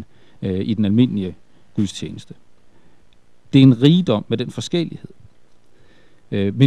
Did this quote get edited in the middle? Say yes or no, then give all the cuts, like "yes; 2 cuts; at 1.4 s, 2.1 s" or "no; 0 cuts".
no; 0 cuts